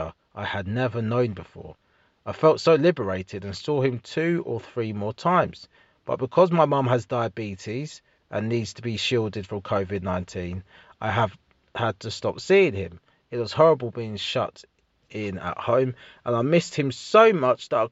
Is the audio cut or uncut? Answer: uncut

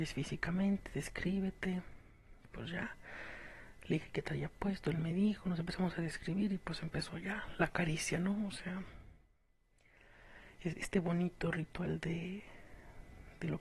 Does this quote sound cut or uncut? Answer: uncut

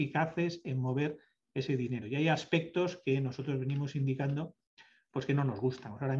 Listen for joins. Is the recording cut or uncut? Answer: uncut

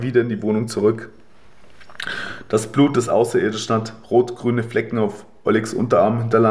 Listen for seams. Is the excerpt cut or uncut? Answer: uncut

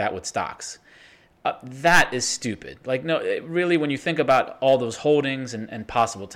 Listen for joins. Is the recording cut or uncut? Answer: uncut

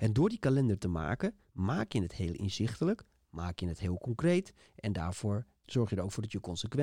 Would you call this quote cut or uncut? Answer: cut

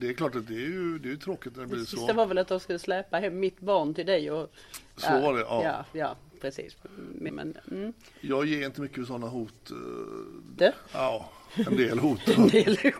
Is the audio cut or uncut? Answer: cut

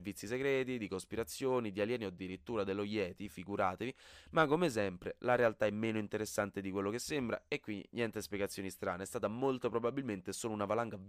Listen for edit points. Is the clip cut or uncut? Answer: uncut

